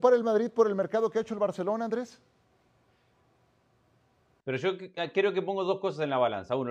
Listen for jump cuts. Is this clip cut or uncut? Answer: cut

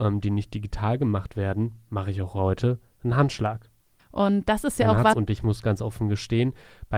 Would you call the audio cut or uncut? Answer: cut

